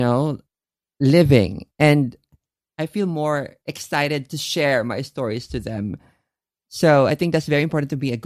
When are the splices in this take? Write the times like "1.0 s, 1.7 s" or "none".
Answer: none